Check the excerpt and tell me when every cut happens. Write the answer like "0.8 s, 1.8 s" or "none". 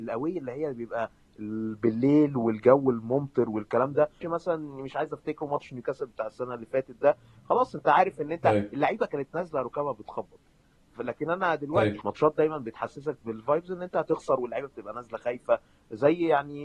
4.2 s, 12.0 s